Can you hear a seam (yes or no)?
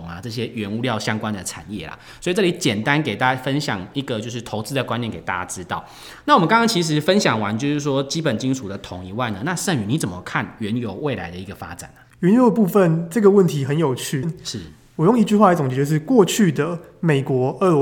yes